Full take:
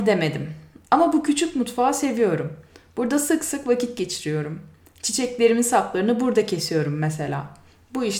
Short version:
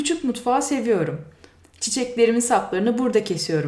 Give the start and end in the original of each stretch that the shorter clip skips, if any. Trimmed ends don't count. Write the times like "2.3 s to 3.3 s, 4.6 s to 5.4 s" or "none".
2.9 s to 4.8 s